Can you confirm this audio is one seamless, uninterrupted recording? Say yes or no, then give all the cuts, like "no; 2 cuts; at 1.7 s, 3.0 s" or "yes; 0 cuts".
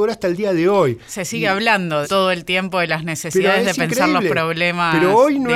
no; 1 cut; at 2.0 s